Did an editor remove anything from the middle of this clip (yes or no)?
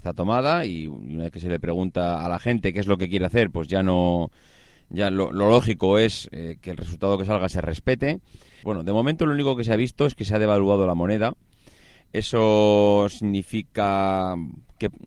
yes